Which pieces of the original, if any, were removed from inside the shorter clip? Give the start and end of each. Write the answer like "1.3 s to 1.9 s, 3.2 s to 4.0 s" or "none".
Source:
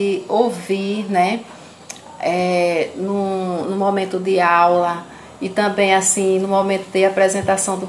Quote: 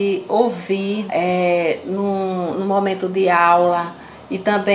1.1 s to 2.2 s